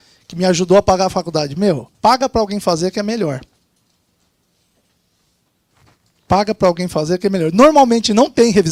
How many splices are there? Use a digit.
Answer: 1